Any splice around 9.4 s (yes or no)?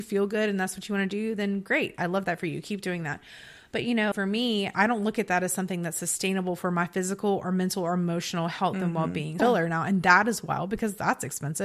yes